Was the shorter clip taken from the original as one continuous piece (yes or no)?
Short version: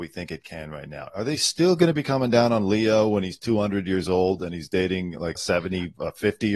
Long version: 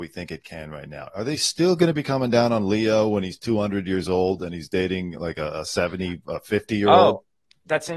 no